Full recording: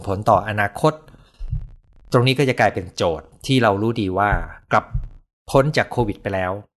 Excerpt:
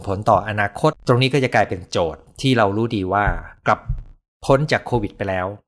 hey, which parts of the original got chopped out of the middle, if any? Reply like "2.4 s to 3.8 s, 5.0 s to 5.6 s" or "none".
0.9 s to 2.0 s